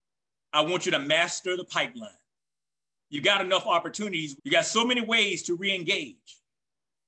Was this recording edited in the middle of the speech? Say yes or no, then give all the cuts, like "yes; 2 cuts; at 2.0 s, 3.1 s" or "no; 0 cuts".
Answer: yes; 2 cuts; at 3.0 s, 4.4 s